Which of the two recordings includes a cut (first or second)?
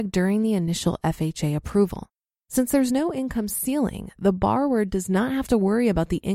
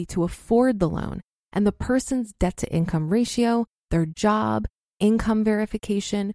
first